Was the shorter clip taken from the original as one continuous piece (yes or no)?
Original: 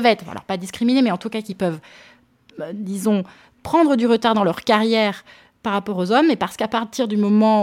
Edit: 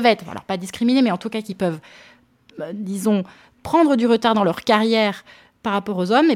yes